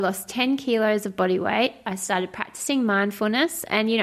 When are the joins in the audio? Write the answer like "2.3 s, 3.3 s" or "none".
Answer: none